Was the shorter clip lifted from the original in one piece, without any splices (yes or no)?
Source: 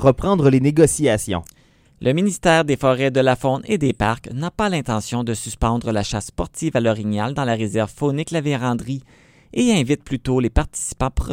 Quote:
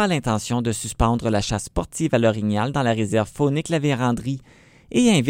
yes